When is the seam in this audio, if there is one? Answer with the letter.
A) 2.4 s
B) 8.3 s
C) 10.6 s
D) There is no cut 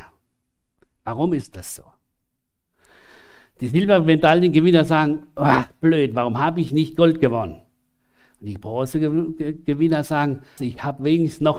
C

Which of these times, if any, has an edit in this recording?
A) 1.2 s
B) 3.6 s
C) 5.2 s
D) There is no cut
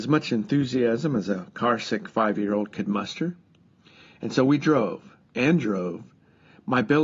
C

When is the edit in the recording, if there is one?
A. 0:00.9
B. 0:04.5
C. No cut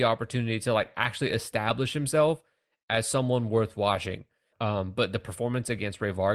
B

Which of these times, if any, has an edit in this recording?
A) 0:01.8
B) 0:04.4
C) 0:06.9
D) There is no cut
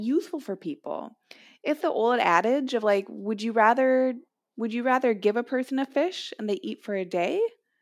A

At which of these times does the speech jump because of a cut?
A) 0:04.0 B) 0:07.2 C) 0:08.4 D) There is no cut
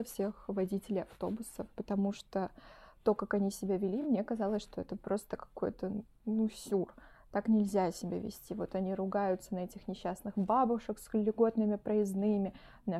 D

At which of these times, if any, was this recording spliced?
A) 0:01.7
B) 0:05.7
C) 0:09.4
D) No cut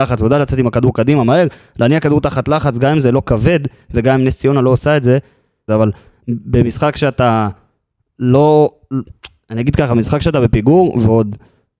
B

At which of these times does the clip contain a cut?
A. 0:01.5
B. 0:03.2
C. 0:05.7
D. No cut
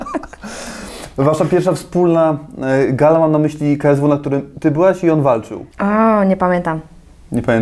C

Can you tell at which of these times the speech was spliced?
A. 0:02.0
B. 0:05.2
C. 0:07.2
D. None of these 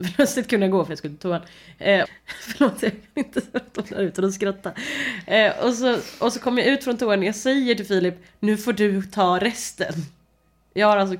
A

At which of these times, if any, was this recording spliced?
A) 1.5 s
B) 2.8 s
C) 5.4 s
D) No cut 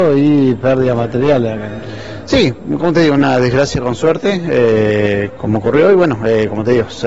C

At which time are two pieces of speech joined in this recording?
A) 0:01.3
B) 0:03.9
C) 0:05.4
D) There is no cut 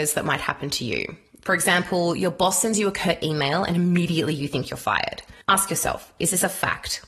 C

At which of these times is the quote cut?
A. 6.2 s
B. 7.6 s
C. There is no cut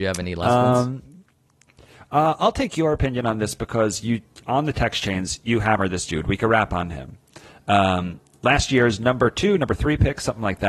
C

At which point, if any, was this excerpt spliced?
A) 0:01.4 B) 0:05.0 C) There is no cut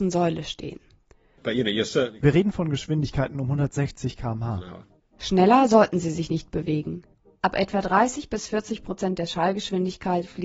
A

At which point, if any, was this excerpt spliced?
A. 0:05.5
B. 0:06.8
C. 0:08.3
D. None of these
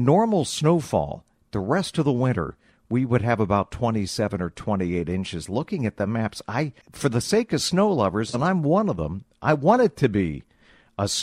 B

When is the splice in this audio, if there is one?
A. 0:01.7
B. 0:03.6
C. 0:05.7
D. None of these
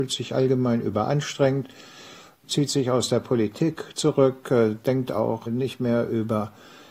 D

